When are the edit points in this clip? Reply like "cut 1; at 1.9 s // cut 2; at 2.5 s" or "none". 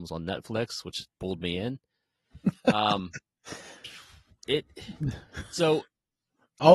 none